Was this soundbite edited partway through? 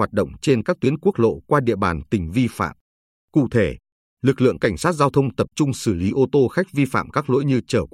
no; 0 cuts

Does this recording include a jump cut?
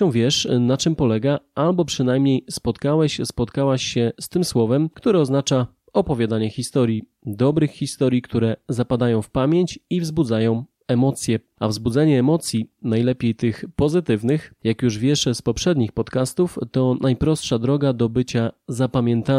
no; 0 cuts

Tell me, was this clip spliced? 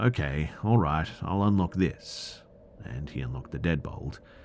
no; 0 cuts

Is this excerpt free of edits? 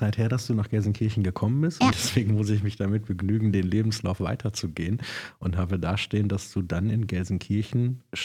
no; 2 cuts; at 1.9 s, 4.2 s

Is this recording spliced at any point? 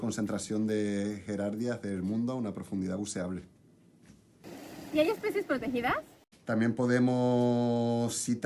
yes; 1 cut; at 6.3 s

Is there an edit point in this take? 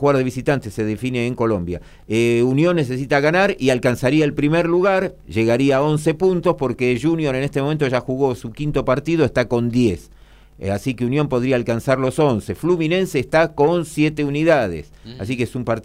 no; 0 cuts

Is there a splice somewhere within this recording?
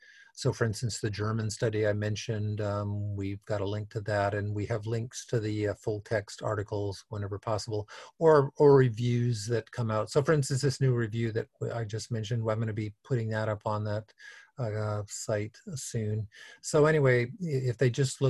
no; 0 cuts

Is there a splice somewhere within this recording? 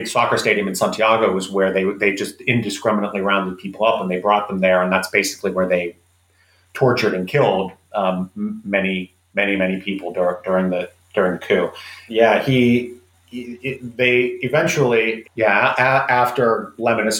yes; 2 cuts; at 12.1 s, 15.2 s

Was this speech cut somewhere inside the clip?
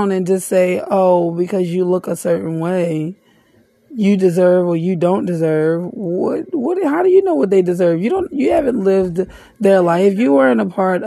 no; 0 cuts

